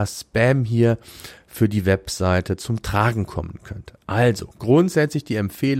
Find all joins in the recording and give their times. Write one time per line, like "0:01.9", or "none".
none